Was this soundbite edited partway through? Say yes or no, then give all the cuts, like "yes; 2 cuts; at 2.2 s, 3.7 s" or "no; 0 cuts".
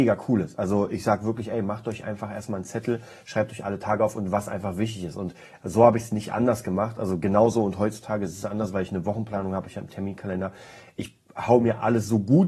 no; 0 cuts